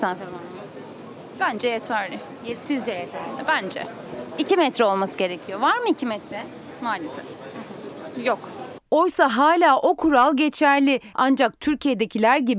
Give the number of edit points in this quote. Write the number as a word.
one